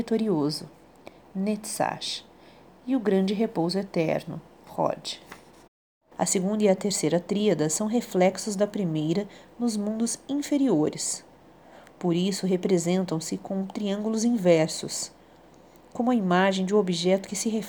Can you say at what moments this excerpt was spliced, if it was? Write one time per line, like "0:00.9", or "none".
0:06.1